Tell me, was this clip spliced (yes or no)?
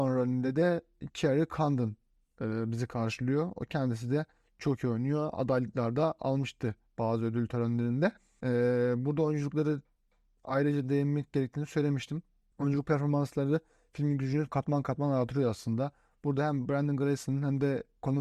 no